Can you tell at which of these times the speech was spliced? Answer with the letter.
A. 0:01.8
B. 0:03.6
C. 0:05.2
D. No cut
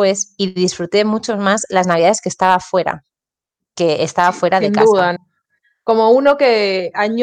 C